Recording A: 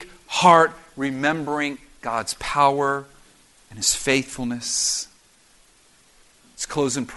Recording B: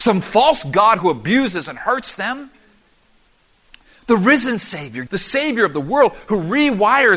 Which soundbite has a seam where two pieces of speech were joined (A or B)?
B